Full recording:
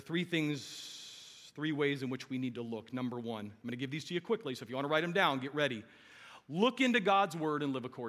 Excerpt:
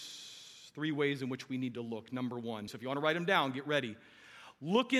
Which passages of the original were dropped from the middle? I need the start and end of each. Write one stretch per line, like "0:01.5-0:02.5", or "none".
0:03.5-0:04.6